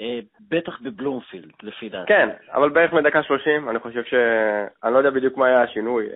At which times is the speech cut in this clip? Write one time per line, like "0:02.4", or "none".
none